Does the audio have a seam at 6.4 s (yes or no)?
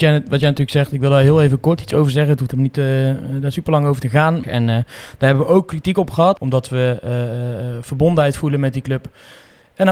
yes